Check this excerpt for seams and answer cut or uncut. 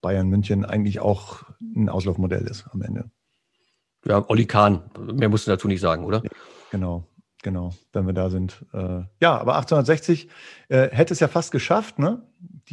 uncut